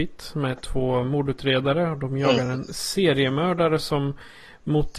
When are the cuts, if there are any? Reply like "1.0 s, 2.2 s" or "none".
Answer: none